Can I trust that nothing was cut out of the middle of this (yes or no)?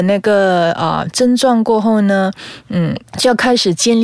yes